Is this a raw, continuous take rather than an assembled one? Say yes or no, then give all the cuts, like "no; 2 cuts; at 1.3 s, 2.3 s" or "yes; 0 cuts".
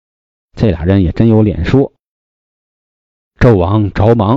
yes; 0 cuts